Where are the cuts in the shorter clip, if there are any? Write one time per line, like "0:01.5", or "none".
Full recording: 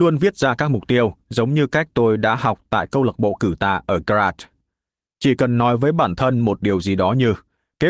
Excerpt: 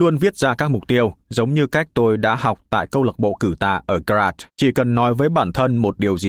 0:04.5